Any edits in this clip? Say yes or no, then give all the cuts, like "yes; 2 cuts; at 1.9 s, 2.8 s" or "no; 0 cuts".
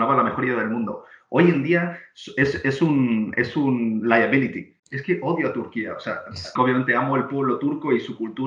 yes; 2 cuts; at 4.8 s, 6.6 s